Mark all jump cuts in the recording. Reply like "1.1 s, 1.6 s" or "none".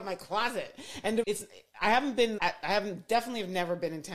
1.2 s, 2.4 s

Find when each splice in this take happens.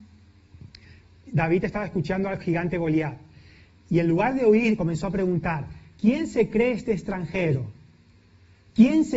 none

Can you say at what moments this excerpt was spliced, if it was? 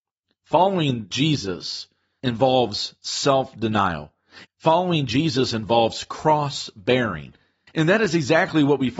4.4 s, 7.7 s

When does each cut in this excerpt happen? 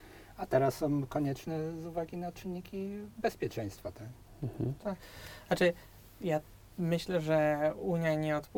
none

